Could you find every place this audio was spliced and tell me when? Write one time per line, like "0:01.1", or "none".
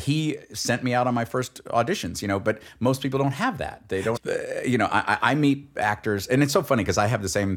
0:04.2